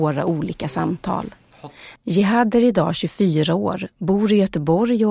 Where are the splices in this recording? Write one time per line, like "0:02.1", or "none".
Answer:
0:02.0